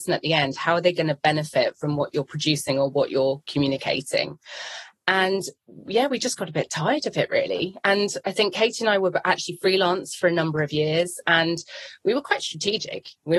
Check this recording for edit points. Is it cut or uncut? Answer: uncut